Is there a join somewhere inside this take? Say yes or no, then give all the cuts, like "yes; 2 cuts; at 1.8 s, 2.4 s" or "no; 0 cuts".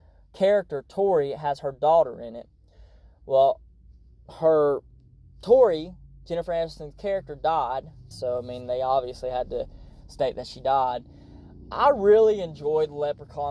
yes; 1 cut; at 8.1 s